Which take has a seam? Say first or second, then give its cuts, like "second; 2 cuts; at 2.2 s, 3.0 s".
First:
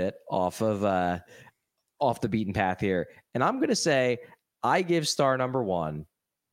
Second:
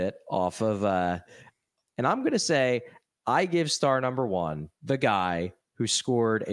second; 2 cuts; at 1.9 s, 4.7 s